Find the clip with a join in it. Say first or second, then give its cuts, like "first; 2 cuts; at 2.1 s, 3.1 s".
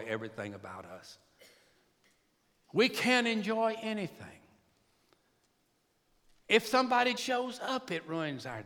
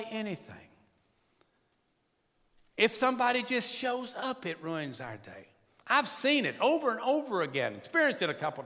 first; 1 cut; at 7.2 s